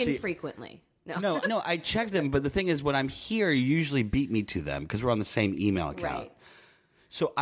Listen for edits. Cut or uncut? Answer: cut